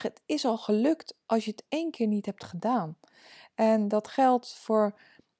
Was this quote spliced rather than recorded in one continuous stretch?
no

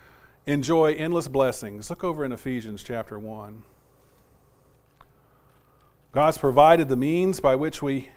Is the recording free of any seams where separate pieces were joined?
yes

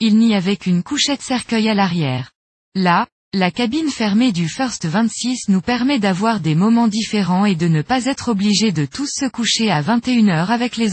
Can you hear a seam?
yes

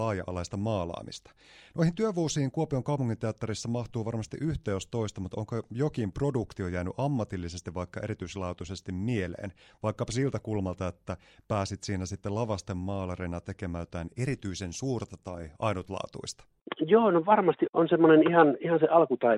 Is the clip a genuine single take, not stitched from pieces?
no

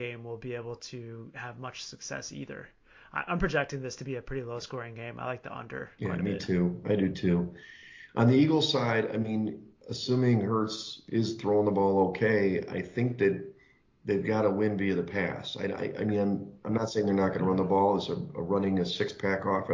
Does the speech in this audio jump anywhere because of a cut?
no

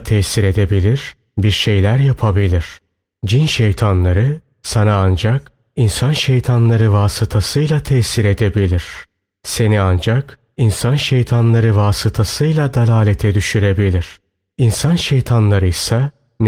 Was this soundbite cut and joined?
no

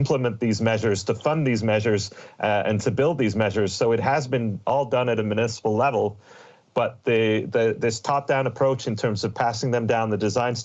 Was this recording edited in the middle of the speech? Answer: no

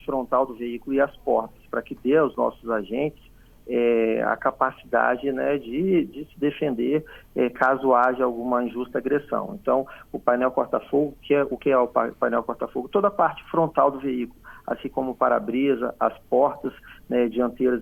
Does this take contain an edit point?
no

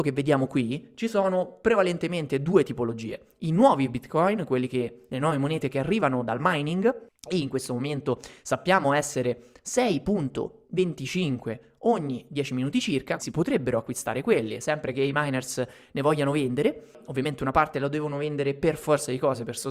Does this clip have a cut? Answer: yes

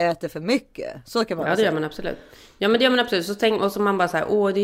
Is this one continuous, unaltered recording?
yes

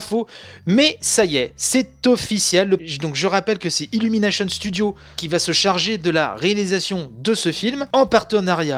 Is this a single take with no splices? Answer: yes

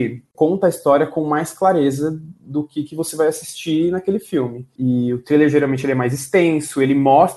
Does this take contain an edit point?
yes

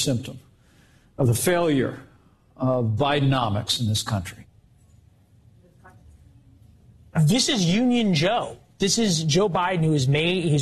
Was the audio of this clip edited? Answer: yes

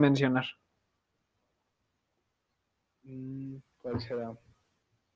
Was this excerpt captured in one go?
yes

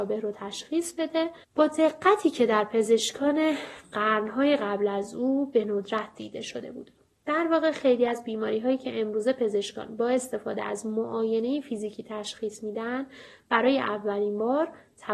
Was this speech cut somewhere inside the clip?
yes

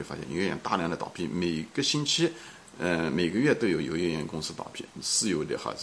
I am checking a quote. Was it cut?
no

